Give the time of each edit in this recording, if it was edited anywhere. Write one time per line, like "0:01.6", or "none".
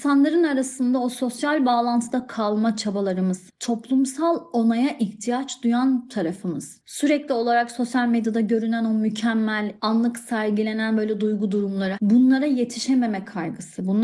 0:09.8
0:11.9

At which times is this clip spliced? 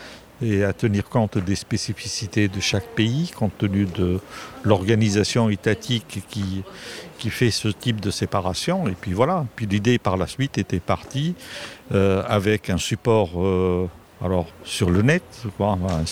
0:14.5

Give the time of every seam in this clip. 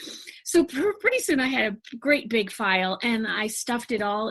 none

